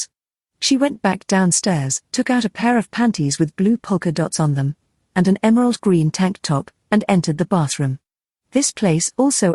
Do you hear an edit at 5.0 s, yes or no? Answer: yes